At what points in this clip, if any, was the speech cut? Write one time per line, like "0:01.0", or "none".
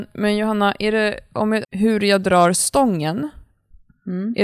0:01.6